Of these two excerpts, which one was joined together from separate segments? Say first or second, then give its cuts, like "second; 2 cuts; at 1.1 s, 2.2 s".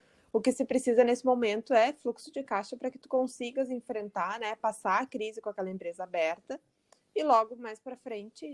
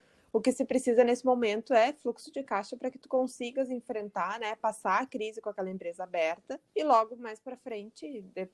second; 1 cut; at 6.7 s